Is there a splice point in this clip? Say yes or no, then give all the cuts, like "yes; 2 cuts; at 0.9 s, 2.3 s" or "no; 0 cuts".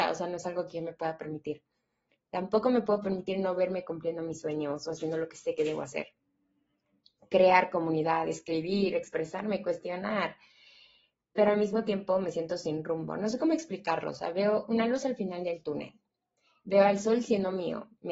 no; 0 cuts